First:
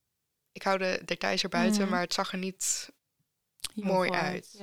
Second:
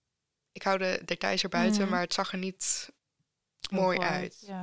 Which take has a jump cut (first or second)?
second